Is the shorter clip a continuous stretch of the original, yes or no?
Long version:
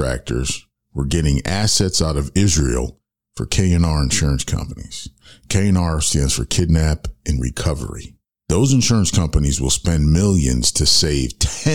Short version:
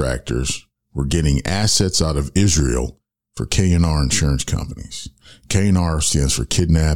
yes